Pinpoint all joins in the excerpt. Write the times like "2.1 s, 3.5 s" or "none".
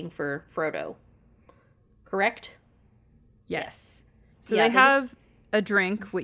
4.3 s